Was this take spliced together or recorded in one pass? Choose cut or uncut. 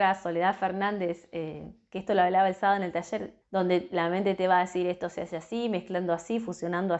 cut